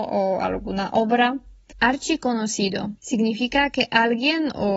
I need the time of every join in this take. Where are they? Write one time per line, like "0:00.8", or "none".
0:01.7
0:03.0